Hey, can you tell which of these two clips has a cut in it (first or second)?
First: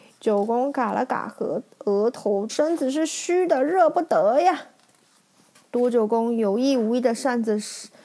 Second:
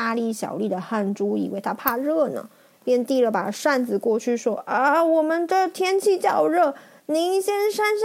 first